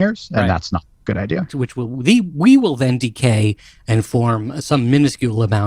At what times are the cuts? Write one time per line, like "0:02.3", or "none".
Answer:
0:01.5